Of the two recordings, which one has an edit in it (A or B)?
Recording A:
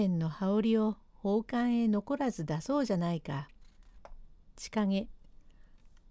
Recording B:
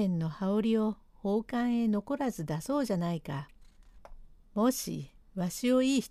B